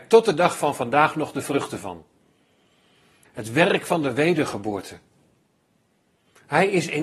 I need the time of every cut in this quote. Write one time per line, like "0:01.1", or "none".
0:03.2